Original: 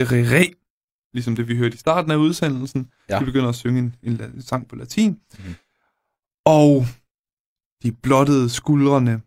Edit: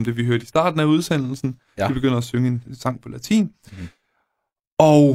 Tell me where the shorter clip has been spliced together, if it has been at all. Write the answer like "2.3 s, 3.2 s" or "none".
2.7 s